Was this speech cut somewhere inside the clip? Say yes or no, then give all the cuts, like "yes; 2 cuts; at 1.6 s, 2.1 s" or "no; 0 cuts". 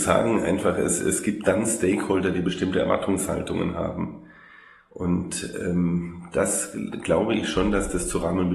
no; 0 cuts